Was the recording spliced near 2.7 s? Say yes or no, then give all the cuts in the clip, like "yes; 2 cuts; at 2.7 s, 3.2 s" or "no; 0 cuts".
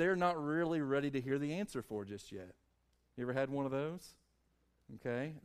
no; 0 cuts